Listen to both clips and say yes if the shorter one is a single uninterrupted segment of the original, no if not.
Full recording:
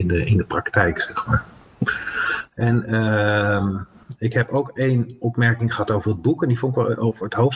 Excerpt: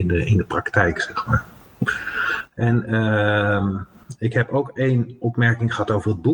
yes